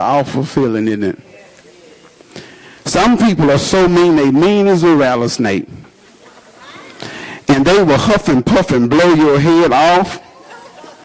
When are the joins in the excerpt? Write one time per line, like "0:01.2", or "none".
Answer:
none